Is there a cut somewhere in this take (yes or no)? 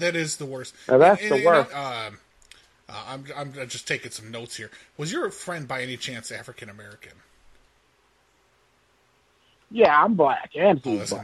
yes